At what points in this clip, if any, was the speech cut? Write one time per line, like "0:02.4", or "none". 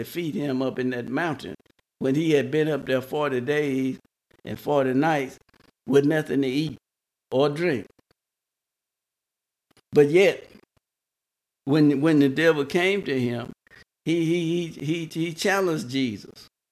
none